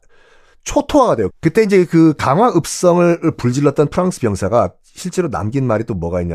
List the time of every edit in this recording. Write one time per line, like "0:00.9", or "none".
0:01.3